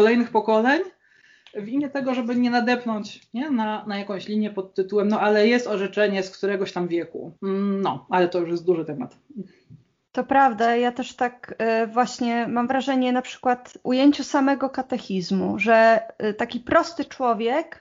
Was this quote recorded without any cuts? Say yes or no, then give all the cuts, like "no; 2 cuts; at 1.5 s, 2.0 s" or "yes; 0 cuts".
yes; 0 cuts